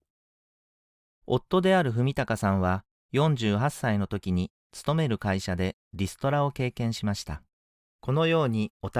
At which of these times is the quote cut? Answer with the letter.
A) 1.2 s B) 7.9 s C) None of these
B